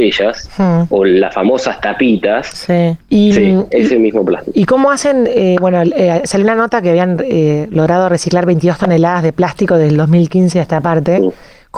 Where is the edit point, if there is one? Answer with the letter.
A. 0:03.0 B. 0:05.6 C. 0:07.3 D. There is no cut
A